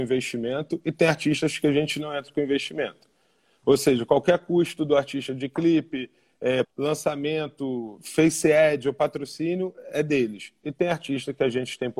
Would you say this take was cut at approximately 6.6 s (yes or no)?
yes